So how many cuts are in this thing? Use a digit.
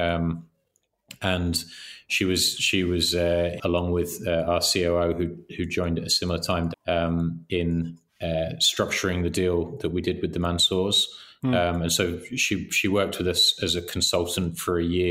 3